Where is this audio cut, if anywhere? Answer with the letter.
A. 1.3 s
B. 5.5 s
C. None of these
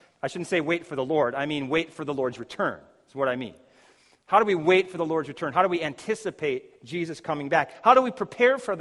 C